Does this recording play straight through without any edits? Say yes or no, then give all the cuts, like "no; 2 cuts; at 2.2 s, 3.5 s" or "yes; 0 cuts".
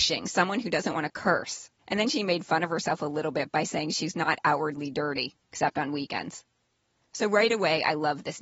no; 1 cut; at 1.8 s